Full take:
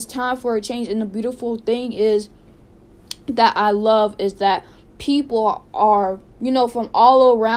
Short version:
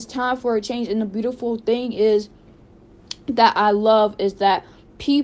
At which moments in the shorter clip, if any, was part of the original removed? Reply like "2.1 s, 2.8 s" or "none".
none